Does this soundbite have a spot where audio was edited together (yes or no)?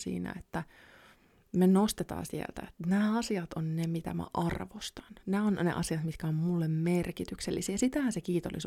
no